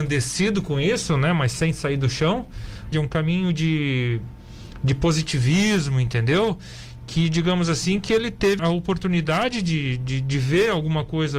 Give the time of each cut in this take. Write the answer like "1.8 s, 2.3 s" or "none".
2.9 s, 8.6 s